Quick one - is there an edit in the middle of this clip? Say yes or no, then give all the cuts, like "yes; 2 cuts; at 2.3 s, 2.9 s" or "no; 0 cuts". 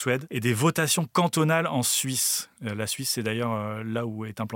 no; 0 cuts